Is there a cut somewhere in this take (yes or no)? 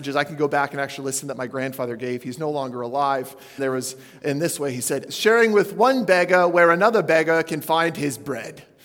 yes